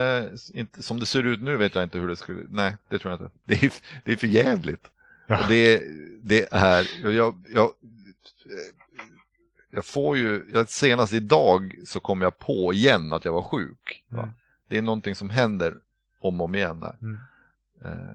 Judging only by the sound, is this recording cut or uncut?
uncut